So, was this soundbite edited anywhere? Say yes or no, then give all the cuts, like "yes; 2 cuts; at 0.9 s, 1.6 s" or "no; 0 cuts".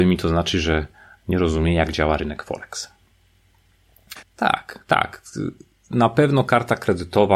yes; 1 cut; at 4.2 s